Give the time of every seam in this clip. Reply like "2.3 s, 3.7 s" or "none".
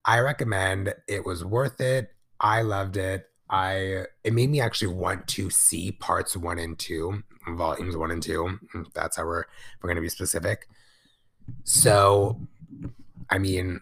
none